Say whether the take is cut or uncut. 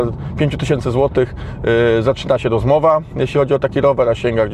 uncut